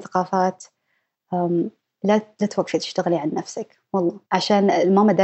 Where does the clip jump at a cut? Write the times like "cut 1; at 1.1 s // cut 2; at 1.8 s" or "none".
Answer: cut 1; at 4.3 s